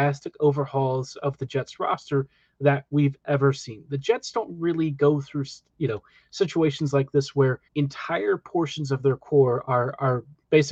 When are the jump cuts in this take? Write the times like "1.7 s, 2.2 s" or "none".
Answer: 7.7 s